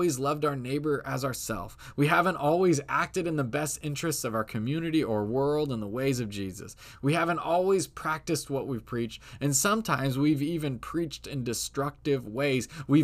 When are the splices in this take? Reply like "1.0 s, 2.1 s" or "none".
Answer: none